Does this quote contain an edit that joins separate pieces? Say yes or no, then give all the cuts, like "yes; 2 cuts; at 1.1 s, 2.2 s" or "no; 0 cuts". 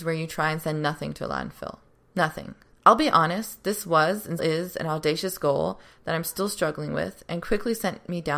yes; 2 cuts; at 2.7 s, 4.4 s